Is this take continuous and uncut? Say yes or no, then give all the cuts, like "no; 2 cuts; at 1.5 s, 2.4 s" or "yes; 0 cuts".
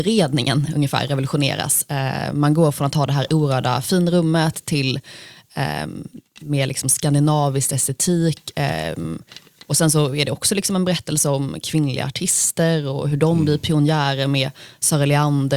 yes; 0 cuts